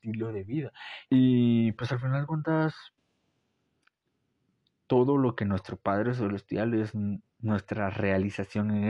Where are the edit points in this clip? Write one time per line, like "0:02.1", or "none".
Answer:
0:01.0
0:07.3